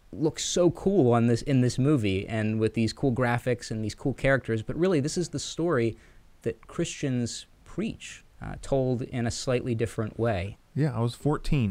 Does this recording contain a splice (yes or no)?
yes